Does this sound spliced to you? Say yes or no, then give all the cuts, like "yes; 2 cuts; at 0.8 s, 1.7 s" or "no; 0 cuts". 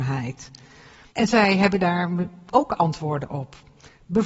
no; 0 cuts